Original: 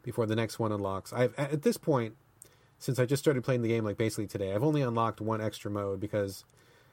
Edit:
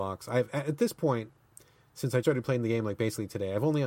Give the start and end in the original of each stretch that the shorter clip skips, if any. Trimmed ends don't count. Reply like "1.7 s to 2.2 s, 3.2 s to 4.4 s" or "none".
3.1 s to 3.2 s